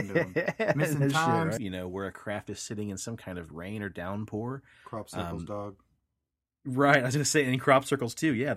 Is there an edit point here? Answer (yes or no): yes